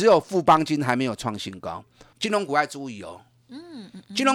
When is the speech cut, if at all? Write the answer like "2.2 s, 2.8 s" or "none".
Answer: 2.1 s